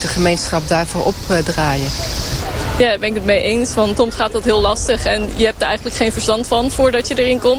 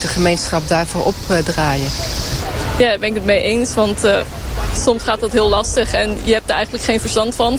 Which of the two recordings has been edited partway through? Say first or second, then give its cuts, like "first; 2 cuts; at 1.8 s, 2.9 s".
first; 1 cut; at 4.0 s